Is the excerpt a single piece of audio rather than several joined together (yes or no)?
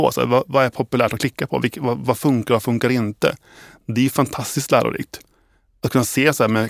yes